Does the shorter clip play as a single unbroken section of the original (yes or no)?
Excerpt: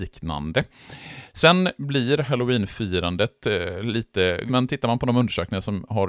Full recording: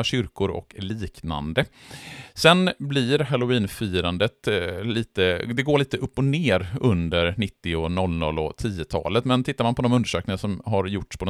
no